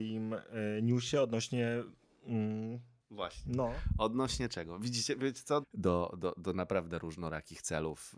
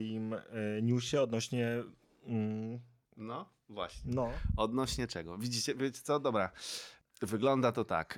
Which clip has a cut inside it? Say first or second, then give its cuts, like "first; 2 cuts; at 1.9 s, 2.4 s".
first; 2 cuts; at 3.0 s, 5.6 s